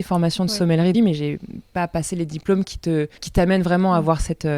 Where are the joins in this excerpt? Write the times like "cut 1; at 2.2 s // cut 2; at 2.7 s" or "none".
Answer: cut 1; at 0.9 s // cut 2; at 3.2 s